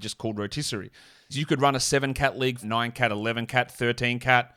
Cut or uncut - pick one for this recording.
cut